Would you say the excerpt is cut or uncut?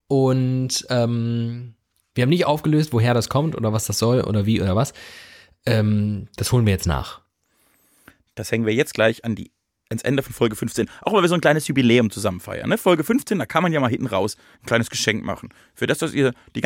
uncut